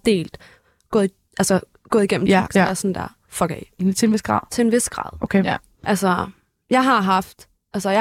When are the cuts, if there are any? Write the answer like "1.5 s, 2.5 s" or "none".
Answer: 2.5 s, 3.7 s